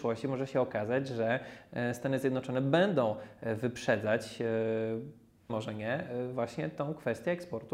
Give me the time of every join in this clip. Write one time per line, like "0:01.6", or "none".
0:05.5